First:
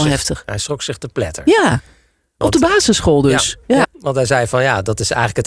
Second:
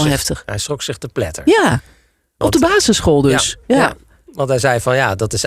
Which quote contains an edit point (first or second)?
first